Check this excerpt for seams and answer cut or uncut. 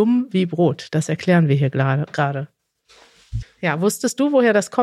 cut